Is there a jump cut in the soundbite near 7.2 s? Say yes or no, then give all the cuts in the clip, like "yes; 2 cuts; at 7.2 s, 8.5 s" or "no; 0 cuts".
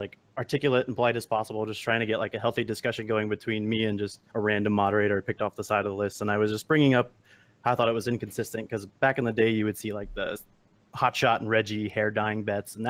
no; 1 cut; at 4.3 s